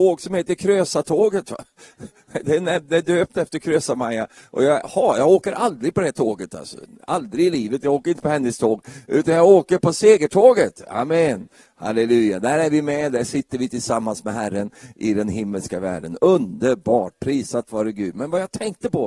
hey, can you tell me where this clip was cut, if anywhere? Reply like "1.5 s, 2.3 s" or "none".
none